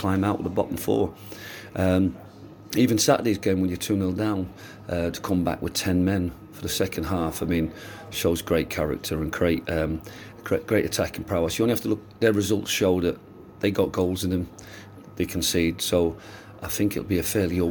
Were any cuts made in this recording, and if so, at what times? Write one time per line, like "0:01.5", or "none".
none